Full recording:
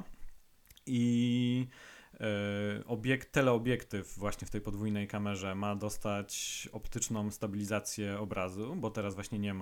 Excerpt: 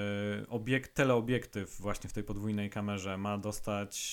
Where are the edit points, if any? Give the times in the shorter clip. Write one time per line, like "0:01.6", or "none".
none